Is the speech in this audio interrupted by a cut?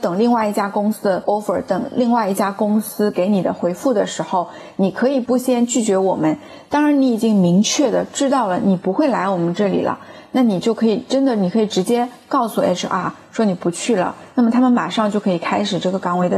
no; 0 cuts

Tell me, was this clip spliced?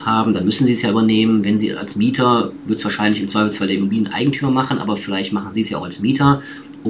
no; 0 cuts

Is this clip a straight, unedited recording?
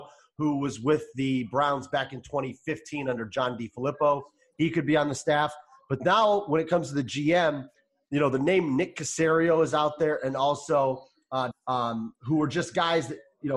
no; 1 cut; at 11.5 s

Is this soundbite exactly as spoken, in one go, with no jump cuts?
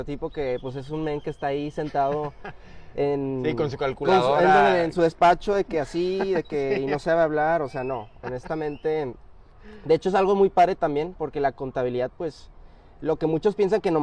yes; 0 cuts

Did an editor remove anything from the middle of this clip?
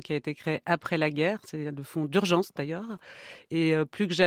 no; 0 cuts

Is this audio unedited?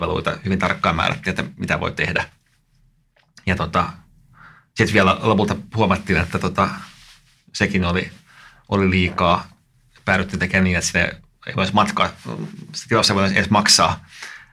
yes; 0 cuts

